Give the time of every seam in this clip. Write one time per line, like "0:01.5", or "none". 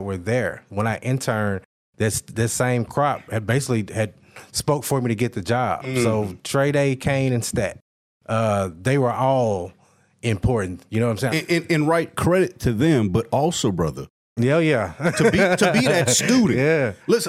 0:11.3
0:14.4